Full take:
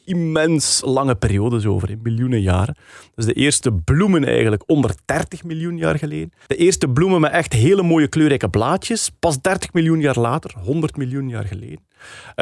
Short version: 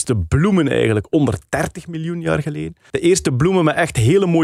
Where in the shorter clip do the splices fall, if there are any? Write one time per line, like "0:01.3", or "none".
none